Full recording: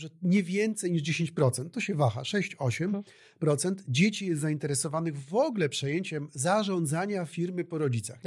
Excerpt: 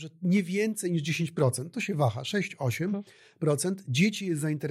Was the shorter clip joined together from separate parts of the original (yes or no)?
no